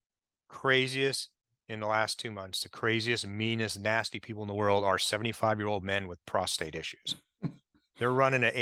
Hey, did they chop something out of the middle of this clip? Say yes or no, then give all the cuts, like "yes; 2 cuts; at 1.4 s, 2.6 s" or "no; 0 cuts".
no; 0 cuts